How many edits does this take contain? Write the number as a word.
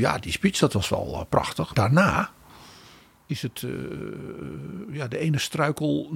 one